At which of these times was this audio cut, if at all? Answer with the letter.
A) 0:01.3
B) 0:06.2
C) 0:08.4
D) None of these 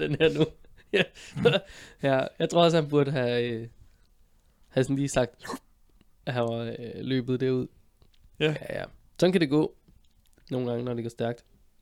B